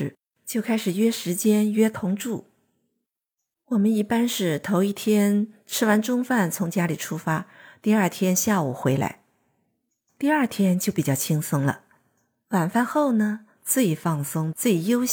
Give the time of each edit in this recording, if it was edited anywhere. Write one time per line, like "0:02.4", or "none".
0:10.1
0:13.6